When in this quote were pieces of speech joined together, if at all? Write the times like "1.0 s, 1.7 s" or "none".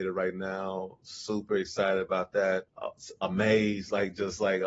2.7 s